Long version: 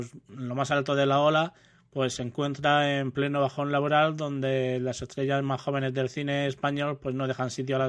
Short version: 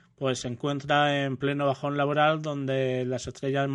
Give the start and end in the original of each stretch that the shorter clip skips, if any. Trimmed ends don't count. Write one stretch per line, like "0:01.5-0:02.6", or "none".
none